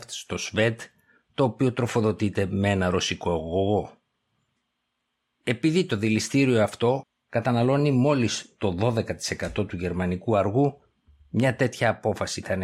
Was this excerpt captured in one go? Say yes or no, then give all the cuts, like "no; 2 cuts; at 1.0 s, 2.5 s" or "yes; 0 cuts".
yes; 0 cuts